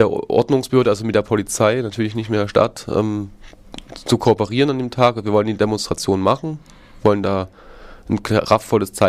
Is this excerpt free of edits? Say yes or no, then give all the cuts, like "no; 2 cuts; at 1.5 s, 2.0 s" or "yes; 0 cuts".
yes; 0 cuts